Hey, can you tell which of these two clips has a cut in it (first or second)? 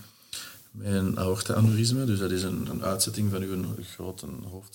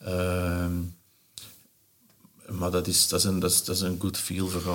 first